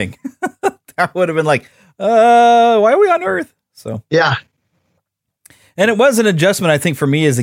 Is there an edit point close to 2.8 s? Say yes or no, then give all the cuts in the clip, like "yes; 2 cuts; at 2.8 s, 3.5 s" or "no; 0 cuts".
no; 0 cuts